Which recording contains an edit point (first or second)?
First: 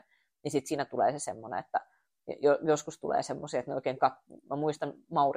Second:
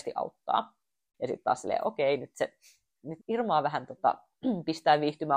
second